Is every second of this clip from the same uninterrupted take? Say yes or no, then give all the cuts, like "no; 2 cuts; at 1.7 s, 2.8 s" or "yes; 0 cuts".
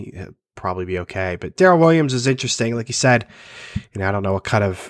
yes; 0 cuts